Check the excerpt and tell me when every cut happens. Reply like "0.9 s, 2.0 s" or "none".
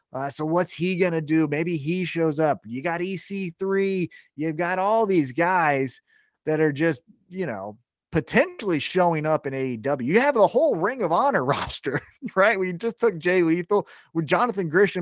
none